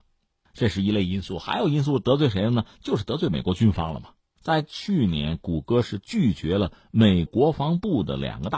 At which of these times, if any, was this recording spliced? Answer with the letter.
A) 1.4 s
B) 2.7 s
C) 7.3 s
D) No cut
C